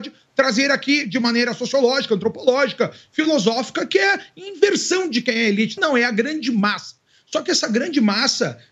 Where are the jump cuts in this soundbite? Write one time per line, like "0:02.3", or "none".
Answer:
0:05.8